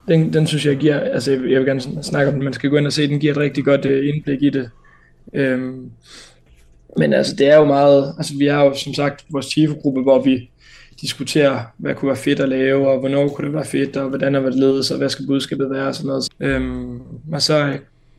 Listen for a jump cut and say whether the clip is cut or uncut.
cut